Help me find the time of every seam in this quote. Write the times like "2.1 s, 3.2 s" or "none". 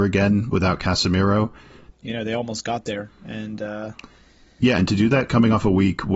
1.9 s